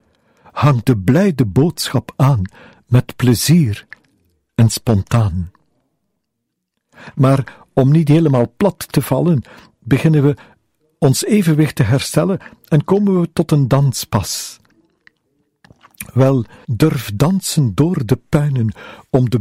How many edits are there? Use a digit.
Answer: 2